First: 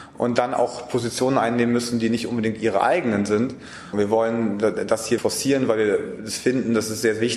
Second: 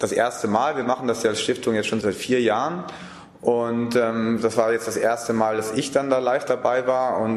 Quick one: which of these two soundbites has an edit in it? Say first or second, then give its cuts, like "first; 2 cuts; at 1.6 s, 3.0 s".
first; 2 cuts; at 3.9 s, 5.2 s